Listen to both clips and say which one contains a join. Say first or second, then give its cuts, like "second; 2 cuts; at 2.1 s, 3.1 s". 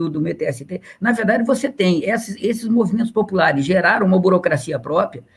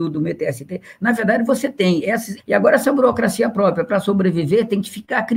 second; 1 cut; at 2.4 s